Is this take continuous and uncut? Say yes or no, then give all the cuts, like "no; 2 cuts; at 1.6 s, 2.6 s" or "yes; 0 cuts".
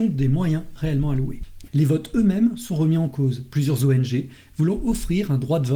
no; 1 cut; at 1.7 s